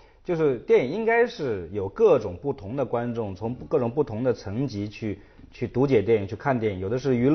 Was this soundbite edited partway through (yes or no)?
no